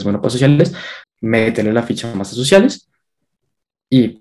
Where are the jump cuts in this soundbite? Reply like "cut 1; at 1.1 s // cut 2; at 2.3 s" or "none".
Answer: cut 1; at 1.0 s